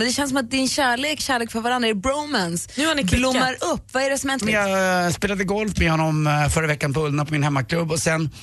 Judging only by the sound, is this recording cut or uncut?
cut